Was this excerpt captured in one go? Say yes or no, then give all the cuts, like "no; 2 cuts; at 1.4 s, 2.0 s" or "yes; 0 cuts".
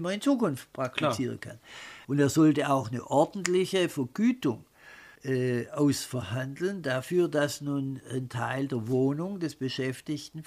no; 2 cuts; at 2.0 s, 5.2 s